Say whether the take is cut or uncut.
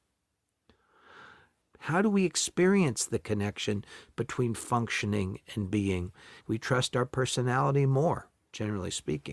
cut